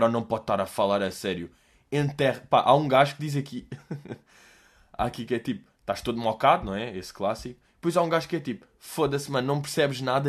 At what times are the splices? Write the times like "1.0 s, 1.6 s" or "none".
none

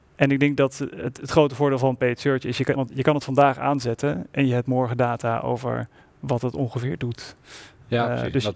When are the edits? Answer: none

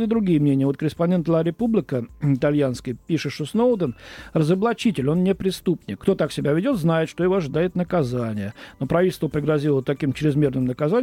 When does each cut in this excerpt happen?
6.0 s

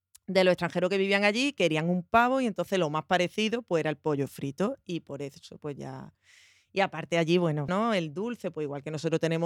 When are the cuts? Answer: 7.7 s

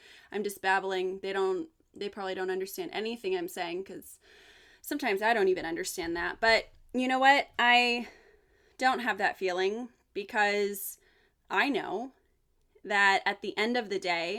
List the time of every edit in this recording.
none

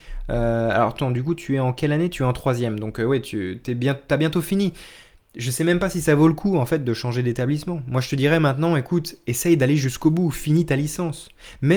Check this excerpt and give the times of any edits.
none

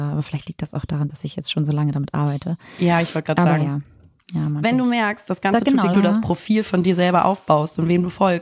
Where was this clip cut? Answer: 4.6 s, 5.9 s

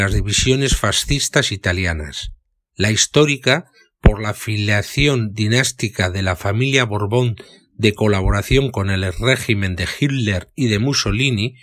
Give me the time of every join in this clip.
2.7 s

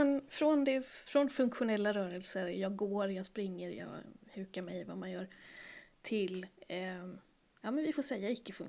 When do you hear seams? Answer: none

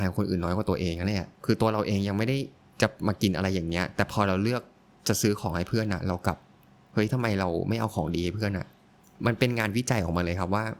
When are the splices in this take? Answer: 1.3 s

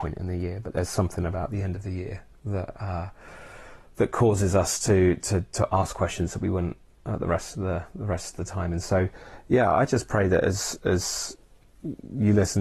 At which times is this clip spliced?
none

